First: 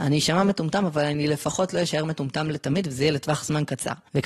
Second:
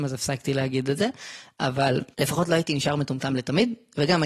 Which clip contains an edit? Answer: second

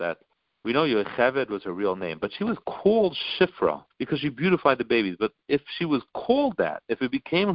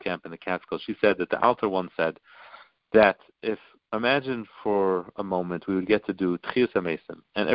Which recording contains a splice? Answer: first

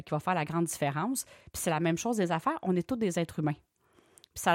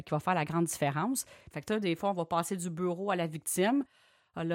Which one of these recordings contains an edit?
second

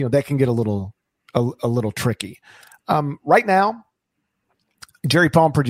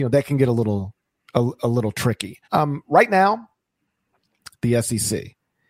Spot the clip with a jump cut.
second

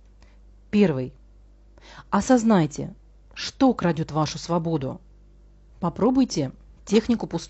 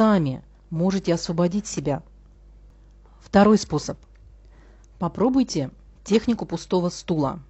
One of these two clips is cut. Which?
first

